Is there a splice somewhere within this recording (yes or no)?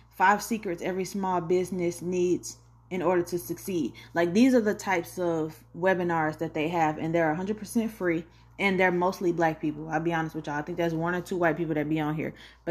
no